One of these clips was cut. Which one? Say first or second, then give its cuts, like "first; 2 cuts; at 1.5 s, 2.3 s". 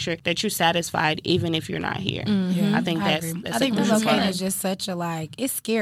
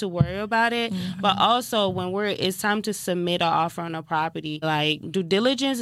second; 1 cut; at 4.6 s